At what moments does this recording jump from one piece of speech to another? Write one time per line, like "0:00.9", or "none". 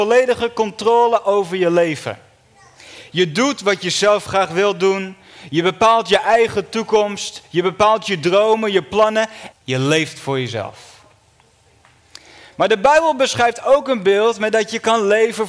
0:09.5